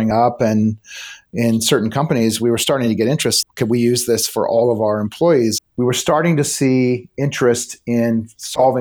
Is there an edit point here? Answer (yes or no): yes